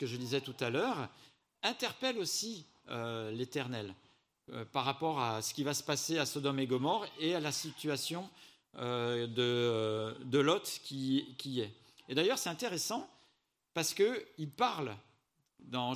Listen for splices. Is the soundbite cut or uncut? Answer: uncut